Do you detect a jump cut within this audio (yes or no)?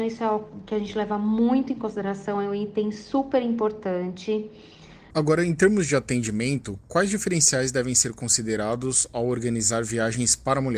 yes